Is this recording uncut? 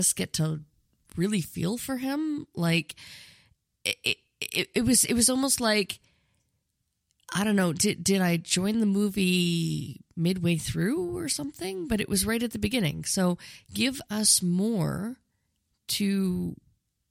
yes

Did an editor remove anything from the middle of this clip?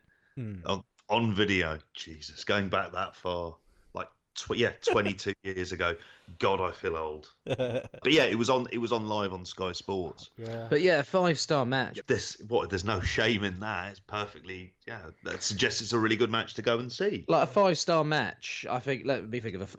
yes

